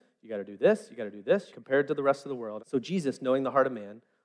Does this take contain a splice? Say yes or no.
yes